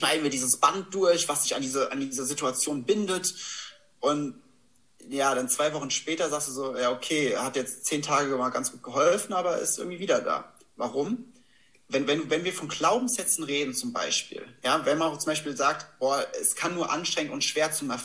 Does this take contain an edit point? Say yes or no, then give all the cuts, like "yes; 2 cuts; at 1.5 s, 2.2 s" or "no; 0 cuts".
no; 0 cuts